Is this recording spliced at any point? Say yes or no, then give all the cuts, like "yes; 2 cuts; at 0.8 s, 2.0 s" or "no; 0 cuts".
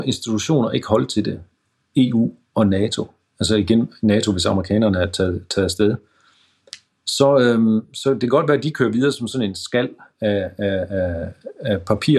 no; 0 cuts